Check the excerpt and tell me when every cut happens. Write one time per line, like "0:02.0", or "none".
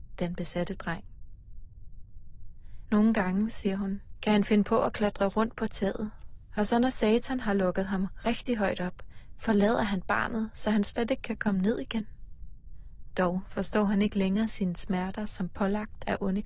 0:02.9
0:13.1